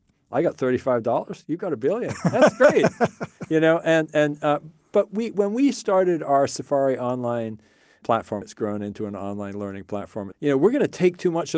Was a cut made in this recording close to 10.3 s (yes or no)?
yes